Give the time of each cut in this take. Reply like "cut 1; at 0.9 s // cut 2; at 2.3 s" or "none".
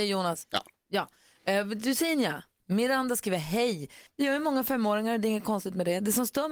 cut 1; at 2.6 s // cut 2; at 4.1 s